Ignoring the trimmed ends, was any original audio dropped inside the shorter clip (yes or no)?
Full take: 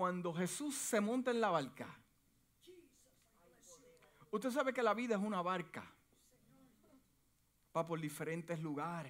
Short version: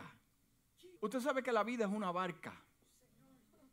yes